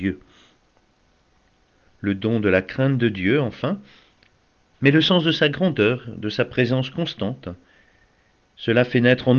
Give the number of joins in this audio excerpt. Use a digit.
2